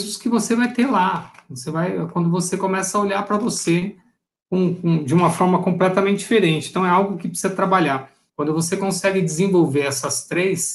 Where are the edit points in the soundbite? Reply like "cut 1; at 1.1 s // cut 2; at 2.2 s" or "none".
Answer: cut 1; at 8.3 s